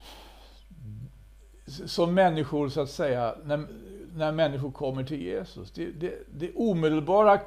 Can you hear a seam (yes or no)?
yes